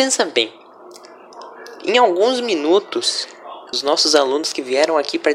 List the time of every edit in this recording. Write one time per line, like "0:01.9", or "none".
0:03.7